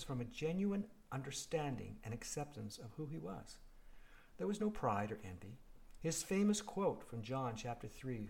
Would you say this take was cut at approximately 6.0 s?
yes; 1 cut; at 6.0 s

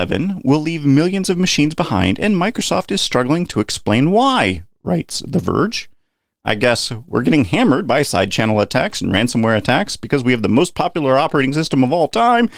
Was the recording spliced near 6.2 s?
no; 0 cuts

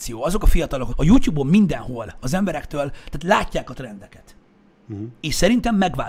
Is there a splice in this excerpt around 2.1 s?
no; 1 cut; at 0.9 s

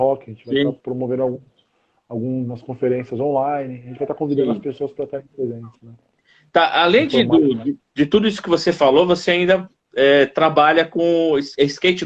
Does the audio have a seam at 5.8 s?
no; 0 cuts

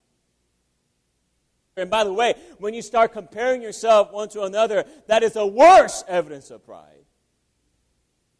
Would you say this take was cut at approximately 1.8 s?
yes; 1 cut; at 1.8 s

